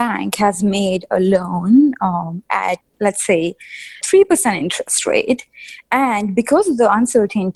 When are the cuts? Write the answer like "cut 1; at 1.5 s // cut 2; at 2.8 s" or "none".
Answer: none